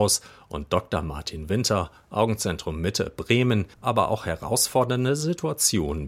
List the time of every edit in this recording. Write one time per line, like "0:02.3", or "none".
0:03.7